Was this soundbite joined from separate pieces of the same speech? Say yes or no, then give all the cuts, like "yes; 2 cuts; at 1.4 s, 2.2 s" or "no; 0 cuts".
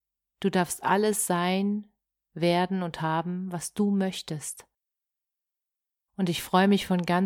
yes; 1 cut; at 6.1 s